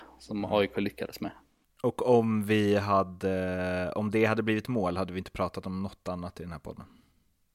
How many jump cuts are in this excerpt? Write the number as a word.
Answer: one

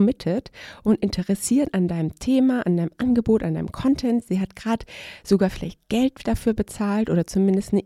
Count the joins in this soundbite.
zero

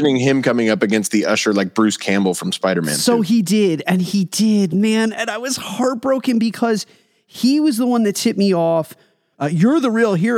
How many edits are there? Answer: one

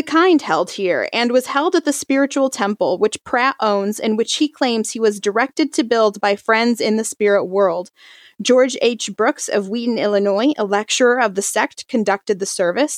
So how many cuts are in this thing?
zero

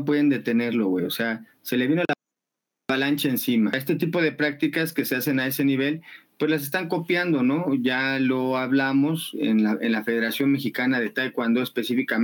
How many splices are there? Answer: zero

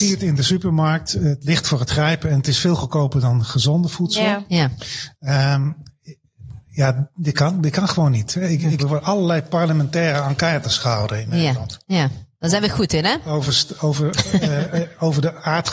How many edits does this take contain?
one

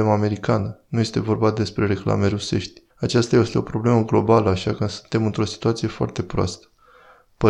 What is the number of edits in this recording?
one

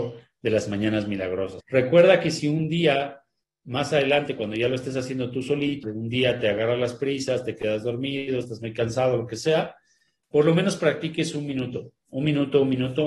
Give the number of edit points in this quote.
two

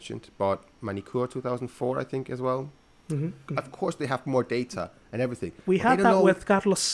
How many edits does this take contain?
one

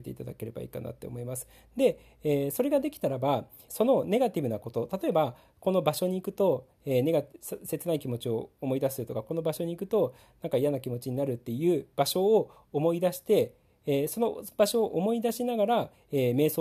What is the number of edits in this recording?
one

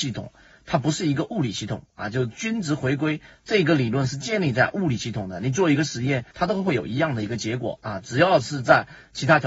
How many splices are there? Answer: one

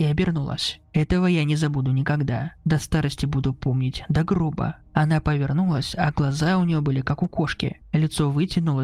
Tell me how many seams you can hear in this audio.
one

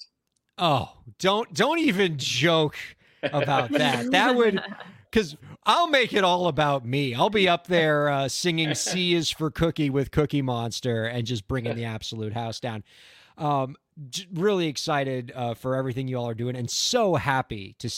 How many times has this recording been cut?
zero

